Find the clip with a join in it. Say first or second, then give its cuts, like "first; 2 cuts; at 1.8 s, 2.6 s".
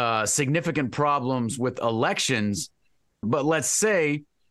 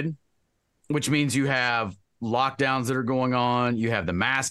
first; 1 cut; at 3.2 s